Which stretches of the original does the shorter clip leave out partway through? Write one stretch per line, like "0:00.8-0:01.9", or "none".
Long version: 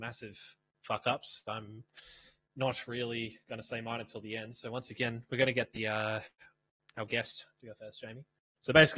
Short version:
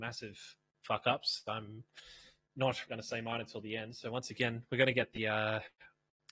0:02.8-0:03.4